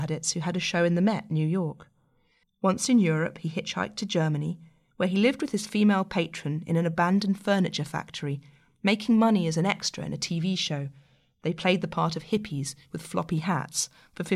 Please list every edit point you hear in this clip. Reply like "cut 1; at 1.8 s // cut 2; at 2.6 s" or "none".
cut 1; at 2.4 s